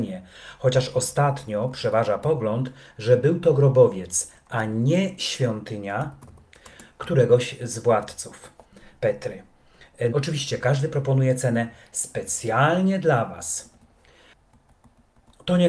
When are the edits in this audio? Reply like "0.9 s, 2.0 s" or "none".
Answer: 10.1 s